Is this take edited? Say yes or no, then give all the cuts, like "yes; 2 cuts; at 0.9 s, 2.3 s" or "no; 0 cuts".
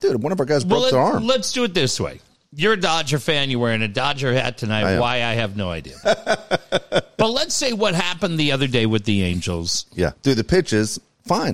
yes; 2 cuts; at 6.0 s, 10.2 s